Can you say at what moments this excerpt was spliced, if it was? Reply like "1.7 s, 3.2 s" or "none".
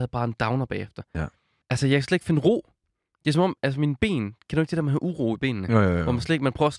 1.6 s